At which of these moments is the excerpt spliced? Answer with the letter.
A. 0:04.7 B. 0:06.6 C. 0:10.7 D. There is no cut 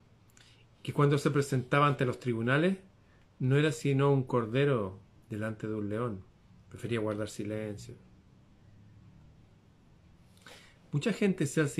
D